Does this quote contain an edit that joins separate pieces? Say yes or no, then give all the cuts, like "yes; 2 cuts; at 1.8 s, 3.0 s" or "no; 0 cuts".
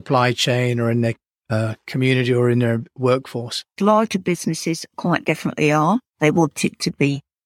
yes; 2 cuts; at 3.8 s, 6.1 s